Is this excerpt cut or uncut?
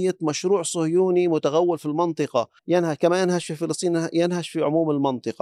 cut